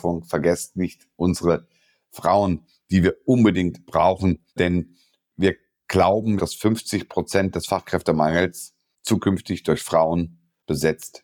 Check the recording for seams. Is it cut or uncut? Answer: cut